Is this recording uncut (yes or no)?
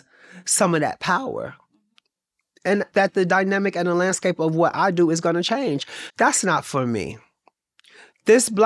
no